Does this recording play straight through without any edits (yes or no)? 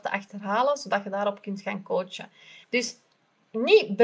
no